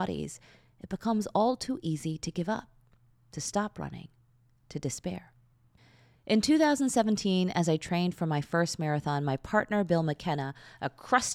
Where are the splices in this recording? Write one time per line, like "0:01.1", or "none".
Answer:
none